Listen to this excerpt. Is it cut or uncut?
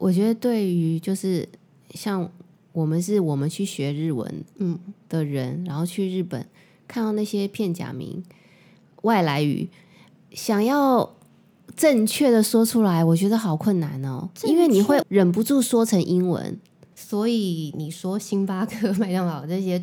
cut